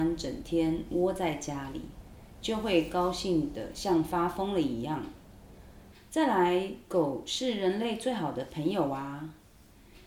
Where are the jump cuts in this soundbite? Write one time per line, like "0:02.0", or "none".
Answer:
0:02.4
0:05.9